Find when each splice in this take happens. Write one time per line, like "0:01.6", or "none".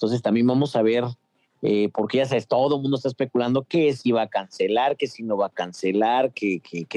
none